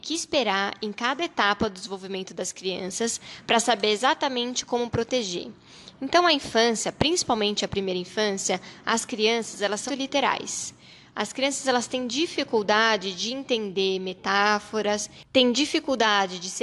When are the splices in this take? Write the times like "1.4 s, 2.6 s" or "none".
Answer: 9.9 s